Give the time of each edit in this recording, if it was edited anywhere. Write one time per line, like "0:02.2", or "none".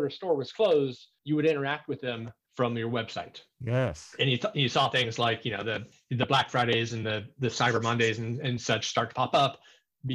none